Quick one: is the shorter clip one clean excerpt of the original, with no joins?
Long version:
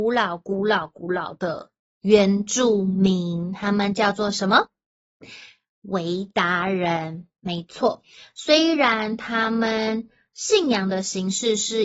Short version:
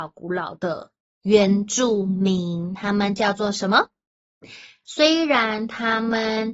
no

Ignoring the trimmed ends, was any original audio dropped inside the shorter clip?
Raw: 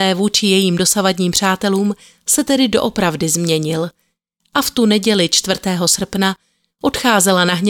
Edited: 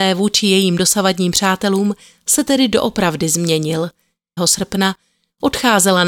yes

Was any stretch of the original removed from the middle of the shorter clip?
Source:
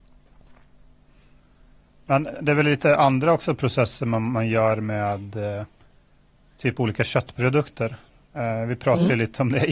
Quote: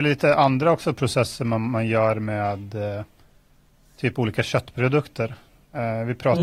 no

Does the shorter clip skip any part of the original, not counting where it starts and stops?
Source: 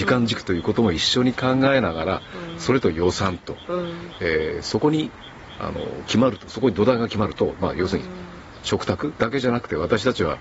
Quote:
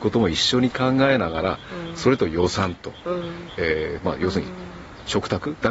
yes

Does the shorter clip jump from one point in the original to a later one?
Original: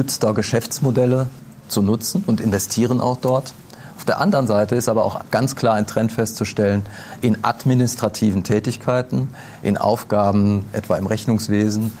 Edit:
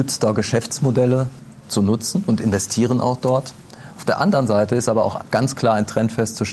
no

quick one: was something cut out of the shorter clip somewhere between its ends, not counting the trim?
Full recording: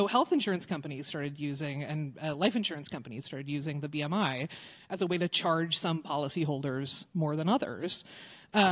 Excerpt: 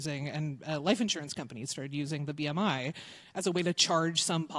no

